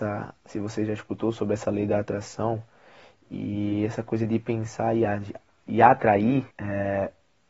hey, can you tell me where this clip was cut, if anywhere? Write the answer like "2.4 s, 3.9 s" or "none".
6.5 s